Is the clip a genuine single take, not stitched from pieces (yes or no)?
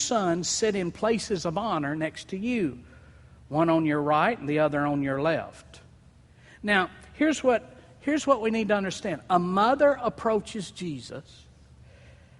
yes